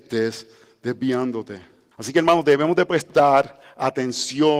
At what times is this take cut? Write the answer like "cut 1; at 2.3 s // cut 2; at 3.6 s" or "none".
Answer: cut 1; at 1.9 s